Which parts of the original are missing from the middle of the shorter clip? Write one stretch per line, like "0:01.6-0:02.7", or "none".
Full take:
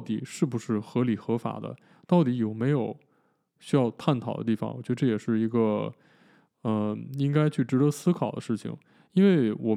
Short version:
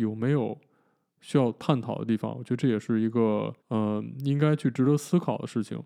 0:06.0-0:06.5